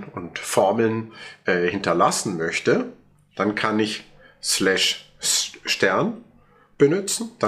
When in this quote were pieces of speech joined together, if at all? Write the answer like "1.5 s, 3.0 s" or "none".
none